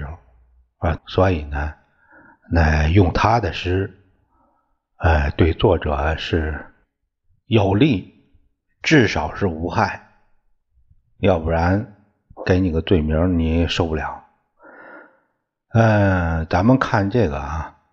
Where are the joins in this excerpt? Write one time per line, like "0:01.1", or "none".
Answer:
0:01.0